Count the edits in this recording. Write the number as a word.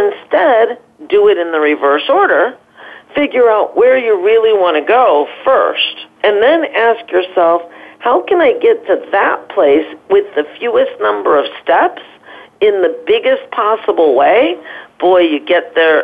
one